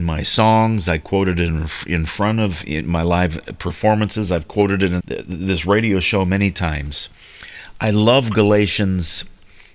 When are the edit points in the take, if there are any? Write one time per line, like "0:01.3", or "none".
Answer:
0:05.0